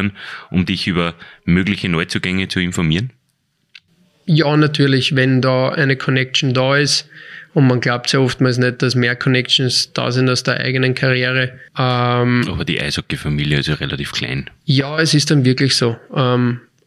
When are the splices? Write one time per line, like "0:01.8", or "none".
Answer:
0:11.7